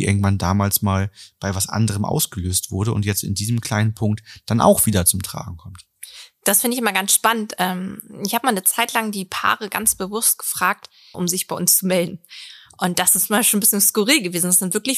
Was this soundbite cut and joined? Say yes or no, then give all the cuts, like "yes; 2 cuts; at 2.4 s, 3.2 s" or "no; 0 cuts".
yes; 1 cut; at 11.1 s